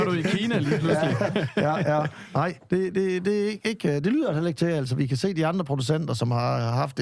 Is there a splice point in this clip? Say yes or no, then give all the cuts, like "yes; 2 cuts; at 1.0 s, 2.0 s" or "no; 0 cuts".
no; 0 cuts